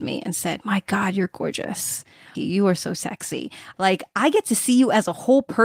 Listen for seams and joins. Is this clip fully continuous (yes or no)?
no